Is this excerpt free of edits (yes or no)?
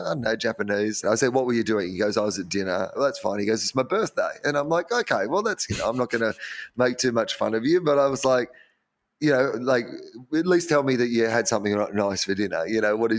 no